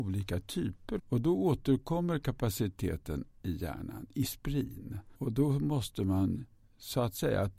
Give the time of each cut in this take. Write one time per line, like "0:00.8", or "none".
0:01.0
0:05.1